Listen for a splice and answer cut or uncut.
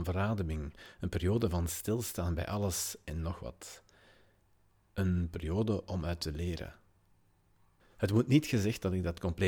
uncut